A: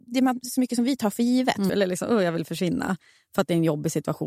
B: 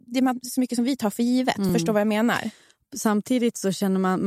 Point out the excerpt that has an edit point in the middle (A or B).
A